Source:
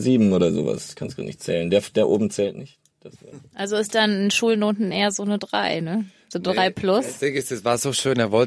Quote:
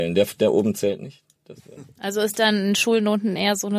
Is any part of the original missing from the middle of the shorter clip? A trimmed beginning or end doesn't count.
no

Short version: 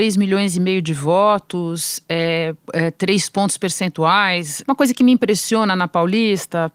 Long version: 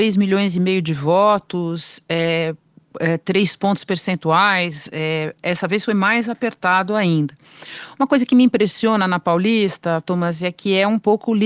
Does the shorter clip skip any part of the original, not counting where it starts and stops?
yes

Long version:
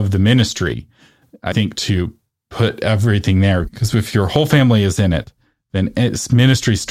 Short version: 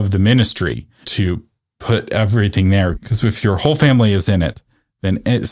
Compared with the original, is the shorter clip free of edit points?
no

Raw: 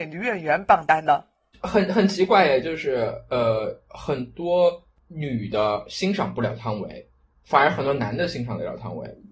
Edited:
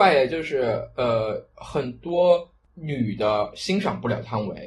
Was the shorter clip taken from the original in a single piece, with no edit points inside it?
yes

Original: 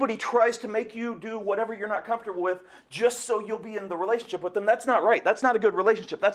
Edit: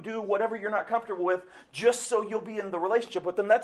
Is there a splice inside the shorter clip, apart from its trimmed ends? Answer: no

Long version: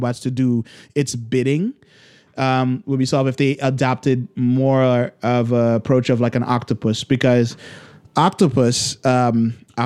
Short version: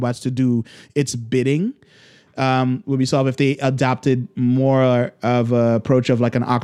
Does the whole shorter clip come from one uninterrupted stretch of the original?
yes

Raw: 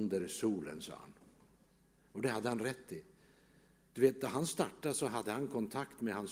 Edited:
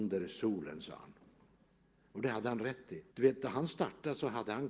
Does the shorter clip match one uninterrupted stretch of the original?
no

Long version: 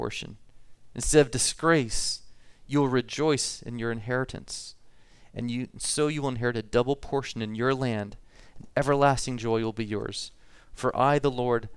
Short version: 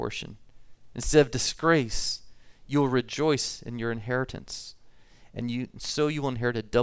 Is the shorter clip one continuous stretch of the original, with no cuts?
yes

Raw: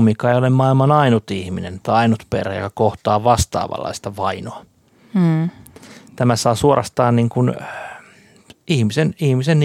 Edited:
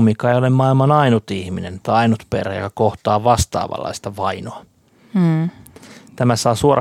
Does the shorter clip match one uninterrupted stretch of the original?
yes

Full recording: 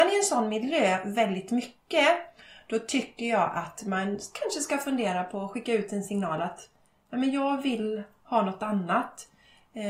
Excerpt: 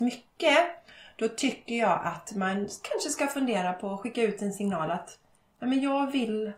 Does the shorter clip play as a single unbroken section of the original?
yes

